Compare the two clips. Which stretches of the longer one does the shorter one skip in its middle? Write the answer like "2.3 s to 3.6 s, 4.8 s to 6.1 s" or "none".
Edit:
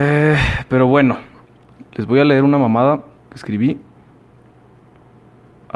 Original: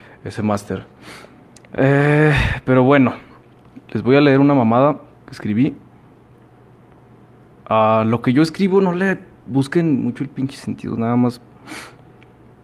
none

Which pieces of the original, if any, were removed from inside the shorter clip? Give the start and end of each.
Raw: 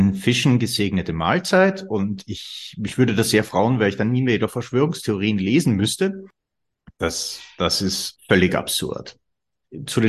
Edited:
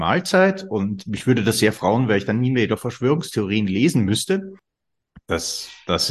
2.2 s to 2.8 s

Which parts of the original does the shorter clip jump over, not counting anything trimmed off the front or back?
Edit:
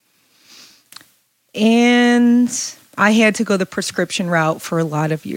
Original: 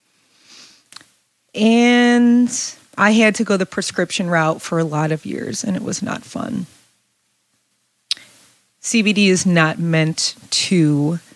none

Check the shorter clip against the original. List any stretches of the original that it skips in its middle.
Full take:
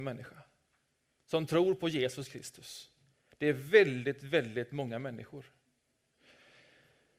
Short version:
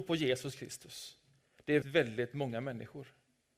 3.5 s to 4.2 s

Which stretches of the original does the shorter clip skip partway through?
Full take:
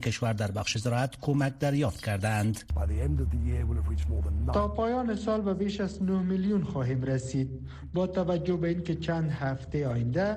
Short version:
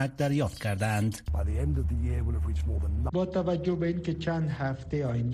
4.5 s to 7.9 s

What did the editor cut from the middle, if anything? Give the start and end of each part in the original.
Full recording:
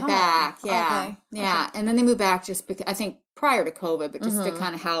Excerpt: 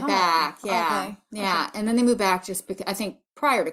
none

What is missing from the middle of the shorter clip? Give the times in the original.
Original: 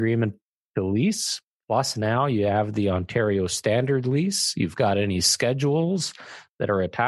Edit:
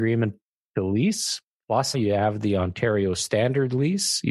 1.9 s to 2.3 s

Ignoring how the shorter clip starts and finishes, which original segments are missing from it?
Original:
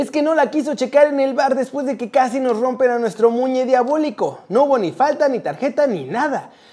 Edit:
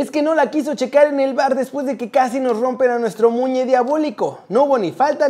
none

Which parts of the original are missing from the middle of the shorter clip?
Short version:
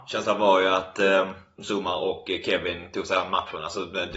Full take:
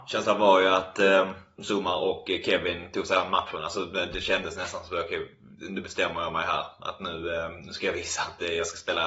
none

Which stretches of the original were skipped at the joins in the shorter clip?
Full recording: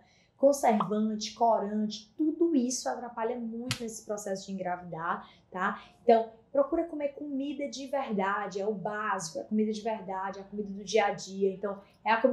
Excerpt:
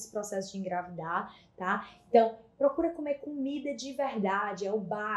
none

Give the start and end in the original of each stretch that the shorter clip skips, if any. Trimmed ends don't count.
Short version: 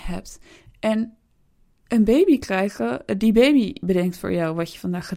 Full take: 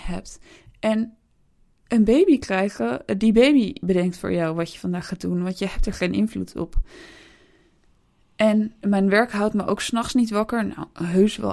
none

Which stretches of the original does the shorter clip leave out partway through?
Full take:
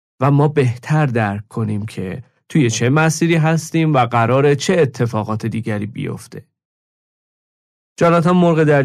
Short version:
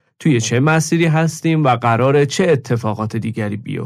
none

